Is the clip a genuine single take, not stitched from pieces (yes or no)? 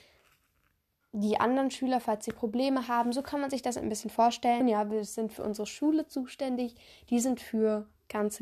no